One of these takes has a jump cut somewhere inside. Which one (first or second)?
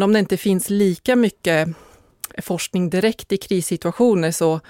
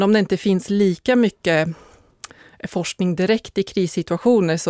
first